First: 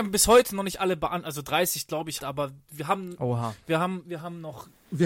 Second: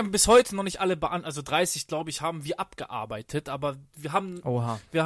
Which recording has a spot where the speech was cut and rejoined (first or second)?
first